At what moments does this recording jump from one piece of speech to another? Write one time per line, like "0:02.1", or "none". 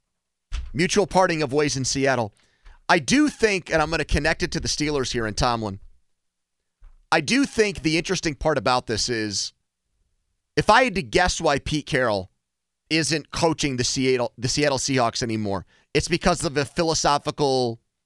none